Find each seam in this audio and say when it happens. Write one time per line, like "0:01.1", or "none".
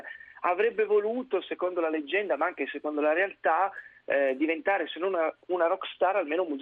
none